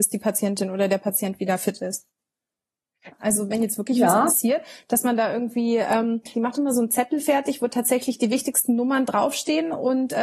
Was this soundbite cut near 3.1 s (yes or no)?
yes